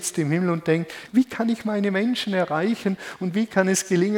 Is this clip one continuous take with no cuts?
no; 1 cut; at 1.1 s

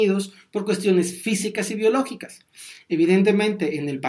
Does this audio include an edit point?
no; 0 cuts

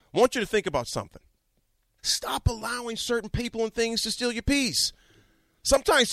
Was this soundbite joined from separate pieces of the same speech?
yes; 1 cut; at 2.0 s

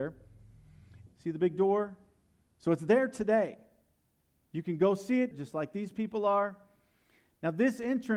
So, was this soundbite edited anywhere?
yes; 2 cuts; at 1.1 s, 5.3 s

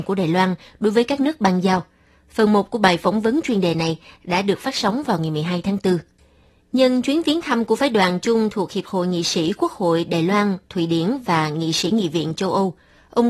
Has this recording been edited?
no; 0 cuts

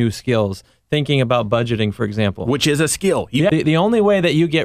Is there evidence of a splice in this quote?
yes; 1 cut; at 3.5 s

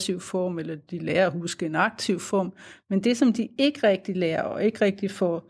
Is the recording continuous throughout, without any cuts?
yes; 0 cuts

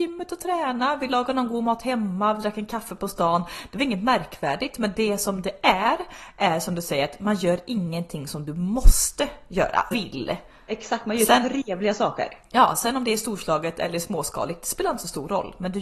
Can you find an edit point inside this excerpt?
yes; 1 cut; at 9.9 s

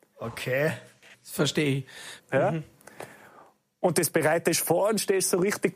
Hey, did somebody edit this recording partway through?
yes; 2 cuts; at 1.1 s, 2.2 s

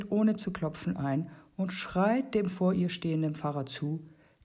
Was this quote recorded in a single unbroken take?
yes; 0 cuts

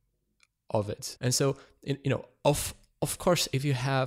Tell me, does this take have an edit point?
yes; 1 cut; at 1.2 s

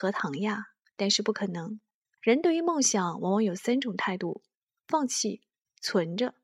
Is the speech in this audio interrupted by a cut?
yes; 1 cut; at 2.2 s

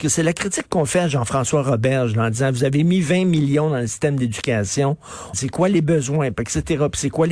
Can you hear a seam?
yes; 1 cut; at 5.3 s

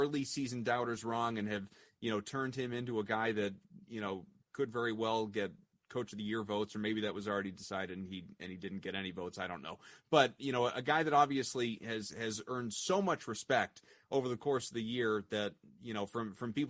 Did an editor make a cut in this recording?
no; 0 cuts

